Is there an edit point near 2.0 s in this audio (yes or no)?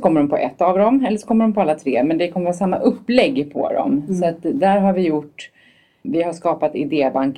no